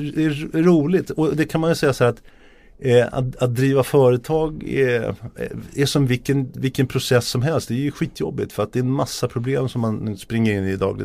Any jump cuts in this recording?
no; 0 cuts

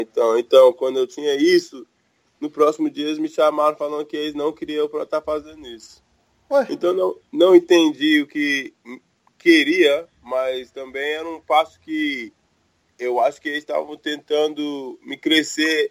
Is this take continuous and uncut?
yes; 0 cuts

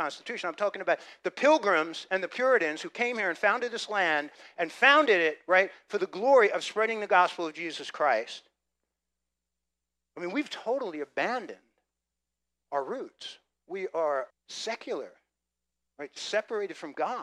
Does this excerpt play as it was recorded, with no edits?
no; 1 cut; at 14.3 s

